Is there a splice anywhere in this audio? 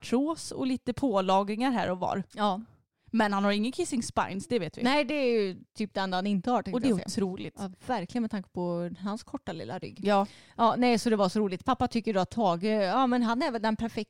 no; 0 cuts

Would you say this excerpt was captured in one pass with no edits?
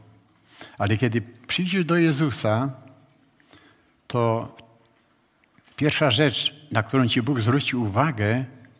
yes; 0 cuts

